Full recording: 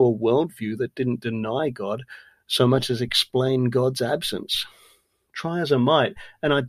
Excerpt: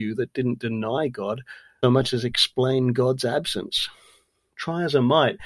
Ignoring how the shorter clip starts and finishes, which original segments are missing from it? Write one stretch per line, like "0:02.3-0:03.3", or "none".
0:02.4-0:02.6